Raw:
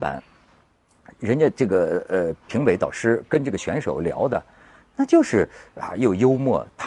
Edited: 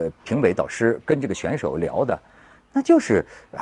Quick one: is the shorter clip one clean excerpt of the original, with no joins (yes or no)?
yes